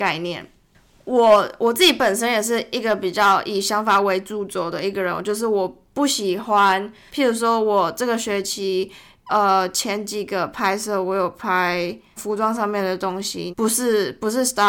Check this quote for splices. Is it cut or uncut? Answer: cut